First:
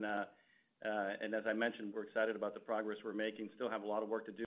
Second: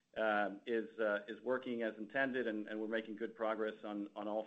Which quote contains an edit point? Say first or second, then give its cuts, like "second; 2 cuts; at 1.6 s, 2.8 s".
first; 1 cut; at 1.9 s